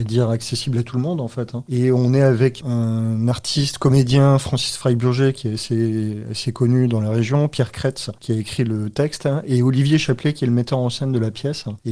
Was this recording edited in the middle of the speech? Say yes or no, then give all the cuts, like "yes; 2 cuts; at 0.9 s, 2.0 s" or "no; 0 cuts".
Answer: yes; 1 cut; at 1.7 s